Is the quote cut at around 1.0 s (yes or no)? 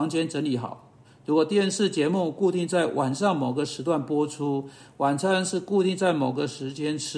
yes